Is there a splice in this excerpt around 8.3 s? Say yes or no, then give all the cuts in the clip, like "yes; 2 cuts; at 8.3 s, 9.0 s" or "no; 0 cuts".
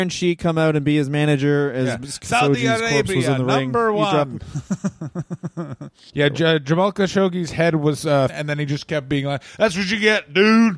yes; 2 cuts; at 6.1 s, 8.3 s